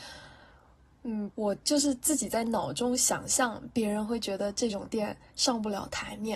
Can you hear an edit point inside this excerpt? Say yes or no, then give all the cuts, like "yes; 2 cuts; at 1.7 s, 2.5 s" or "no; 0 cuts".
yes; 1 cut; at 1.3 s